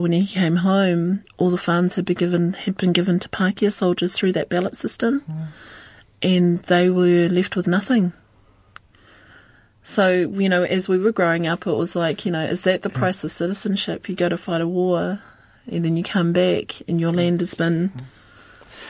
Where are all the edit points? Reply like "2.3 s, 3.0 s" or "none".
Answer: none